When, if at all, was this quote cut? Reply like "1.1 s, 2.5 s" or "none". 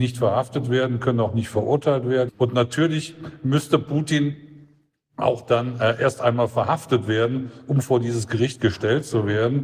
2.3 s